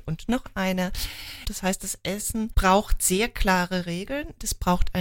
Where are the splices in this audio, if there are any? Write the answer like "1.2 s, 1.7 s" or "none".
1.4 s, 2.5 s